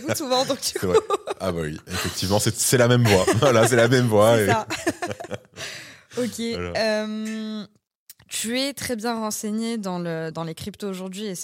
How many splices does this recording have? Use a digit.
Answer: 1